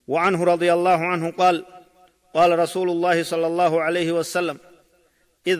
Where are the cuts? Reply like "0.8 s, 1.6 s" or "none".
none